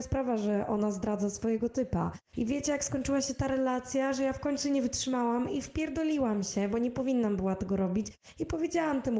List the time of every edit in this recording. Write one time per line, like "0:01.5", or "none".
0:02.3